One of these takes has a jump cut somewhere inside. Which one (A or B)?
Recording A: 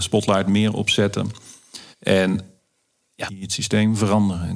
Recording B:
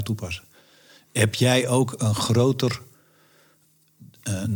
A